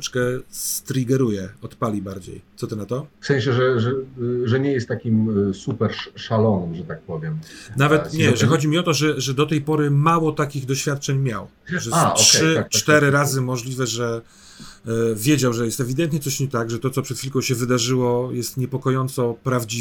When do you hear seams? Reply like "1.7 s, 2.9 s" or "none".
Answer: 3.1 s